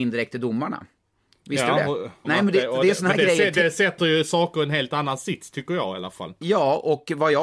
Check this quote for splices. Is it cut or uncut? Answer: cut